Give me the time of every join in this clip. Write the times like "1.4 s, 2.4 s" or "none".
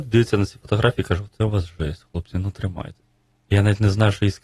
none